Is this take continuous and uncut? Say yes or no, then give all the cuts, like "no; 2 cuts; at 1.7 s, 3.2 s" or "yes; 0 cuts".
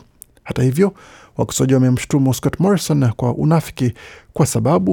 yes; 0 cuts